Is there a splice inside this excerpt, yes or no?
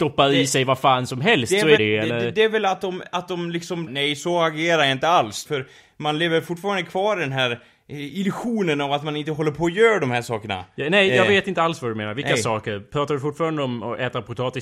yes